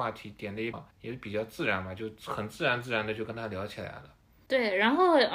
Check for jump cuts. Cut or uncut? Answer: cut